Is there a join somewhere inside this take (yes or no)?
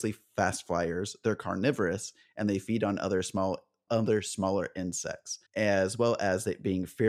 yes